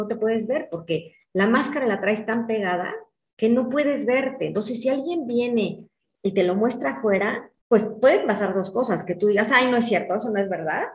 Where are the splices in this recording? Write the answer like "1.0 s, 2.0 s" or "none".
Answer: 7.6 s